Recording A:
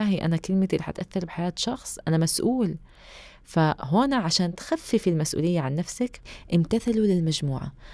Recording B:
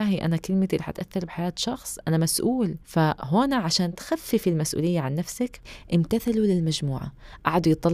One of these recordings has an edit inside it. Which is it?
B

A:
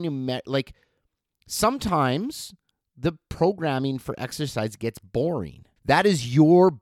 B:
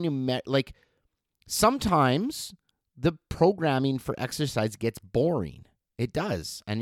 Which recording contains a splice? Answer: A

